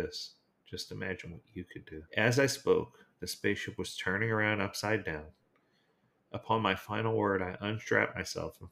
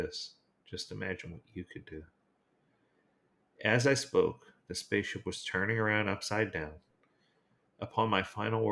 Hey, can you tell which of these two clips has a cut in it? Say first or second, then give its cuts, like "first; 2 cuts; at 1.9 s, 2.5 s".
first; 1 cut; at 2.1 s